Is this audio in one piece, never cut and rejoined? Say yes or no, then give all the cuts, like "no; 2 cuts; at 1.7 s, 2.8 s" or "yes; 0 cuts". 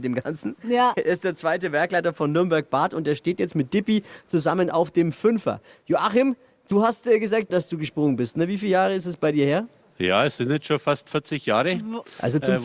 no; 1 cut; at 7.5 s